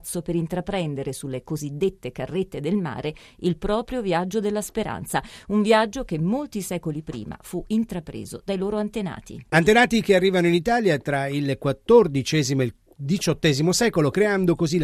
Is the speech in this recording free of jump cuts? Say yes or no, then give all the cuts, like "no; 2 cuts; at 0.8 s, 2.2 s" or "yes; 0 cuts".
yes; 0 cuts